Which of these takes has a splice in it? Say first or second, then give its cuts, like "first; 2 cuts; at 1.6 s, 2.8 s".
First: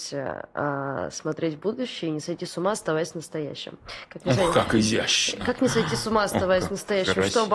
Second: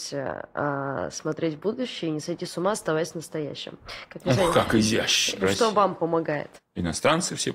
second; 2 cuts; at 5.4 s, 6.5 s